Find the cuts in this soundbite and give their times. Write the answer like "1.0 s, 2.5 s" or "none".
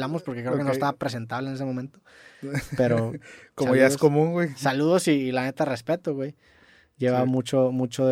none

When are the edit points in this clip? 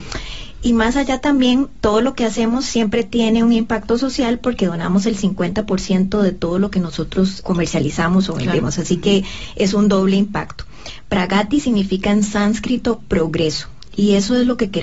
7.4 s

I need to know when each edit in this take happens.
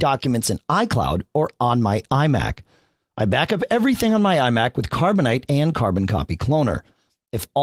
none

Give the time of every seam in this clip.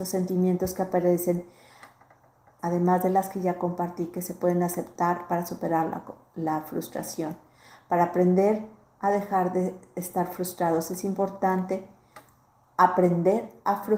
2.6 s

